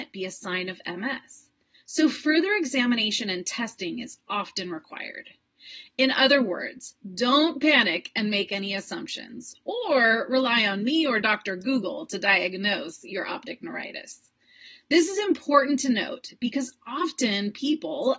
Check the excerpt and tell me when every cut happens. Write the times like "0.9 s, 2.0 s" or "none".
none